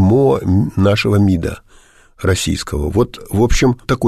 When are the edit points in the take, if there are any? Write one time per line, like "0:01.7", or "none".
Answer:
none